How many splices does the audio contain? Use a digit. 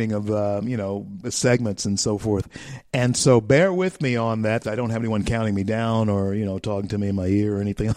1